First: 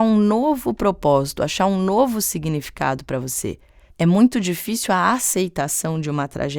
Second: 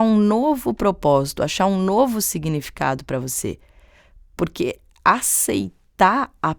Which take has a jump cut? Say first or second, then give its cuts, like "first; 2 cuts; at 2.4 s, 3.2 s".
first; 1 cut; at 3.9 s